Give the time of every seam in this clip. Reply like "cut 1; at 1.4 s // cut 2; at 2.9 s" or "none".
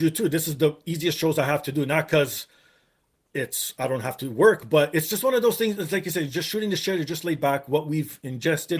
none